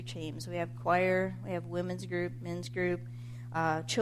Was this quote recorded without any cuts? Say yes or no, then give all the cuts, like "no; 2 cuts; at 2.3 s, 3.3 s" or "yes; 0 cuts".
yes; 0 cuts